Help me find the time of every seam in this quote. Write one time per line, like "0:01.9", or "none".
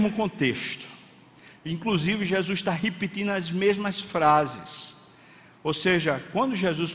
none